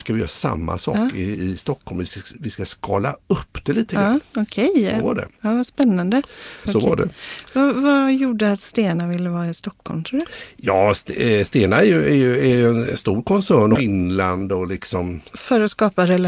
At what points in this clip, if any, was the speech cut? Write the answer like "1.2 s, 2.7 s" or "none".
6.7 s, 13.8 s